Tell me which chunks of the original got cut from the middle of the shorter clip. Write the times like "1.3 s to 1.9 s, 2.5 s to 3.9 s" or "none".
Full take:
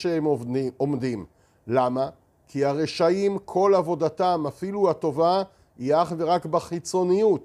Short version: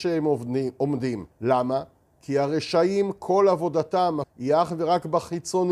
1.3 s to 1.6 s, 4.5 s to 5.6 s